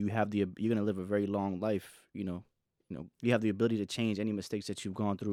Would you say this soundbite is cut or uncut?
cut